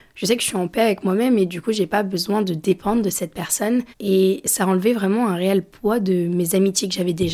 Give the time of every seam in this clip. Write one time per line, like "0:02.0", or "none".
0:03.9